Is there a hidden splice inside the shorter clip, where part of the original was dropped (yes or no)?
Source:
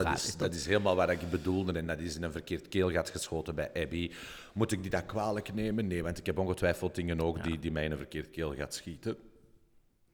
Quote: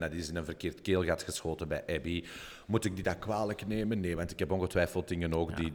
no